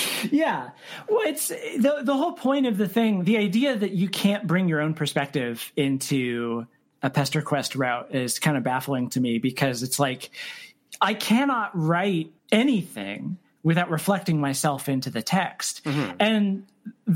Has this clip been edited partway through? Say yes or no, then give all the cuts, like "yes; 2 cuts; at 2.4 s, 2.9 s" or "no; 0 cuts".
yes; 1 cut; at 12.4 s